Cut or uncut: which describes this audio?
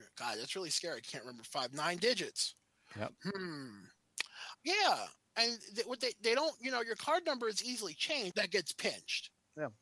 cut